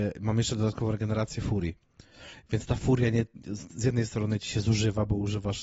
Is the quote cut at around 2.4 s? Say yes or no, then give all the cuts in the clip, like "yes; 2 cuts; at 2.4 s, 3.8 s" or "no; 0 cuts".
no; 0 cuts